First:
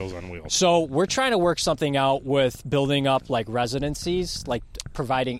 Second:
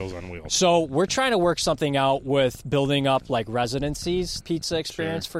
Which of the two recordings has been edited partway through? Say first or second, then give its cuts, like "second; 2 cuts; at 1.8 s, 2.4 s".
second; 1 cut; at 4.4 s